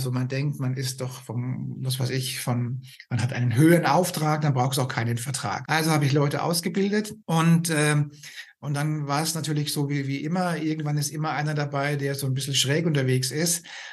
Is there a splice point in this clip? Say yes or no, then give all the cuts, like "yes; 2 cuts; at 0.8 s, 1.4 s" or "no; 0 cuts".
yes; 2 cuts; at 5.7 s, 7.2 s